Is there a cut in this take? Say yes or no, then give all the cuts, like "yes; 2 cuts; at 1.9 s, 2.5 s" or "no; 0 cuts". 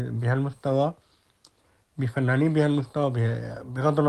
no; 0 cuts